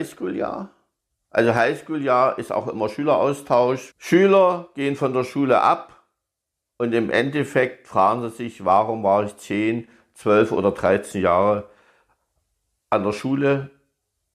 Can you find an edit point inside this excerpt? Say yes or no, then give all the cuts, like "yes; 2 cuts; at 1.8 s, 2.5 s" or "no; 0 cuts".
yes; 1 cut; at 3.9 s